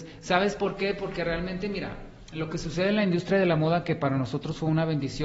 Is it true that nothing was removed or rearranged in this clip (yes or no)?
yes